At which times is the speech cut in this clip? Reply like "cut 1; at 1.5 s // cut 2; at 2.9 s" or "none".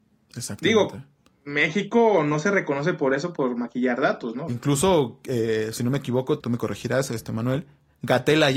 cut 1; at 4.5 s // cut 2; at 6.4 s